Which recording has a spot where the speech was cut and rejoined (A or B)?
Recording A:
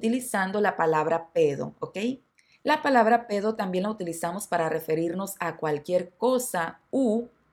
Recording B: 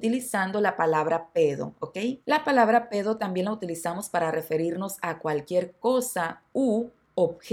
B